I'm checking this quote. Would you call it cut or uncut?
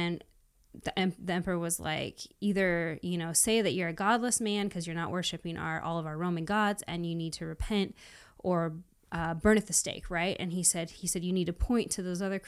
uncut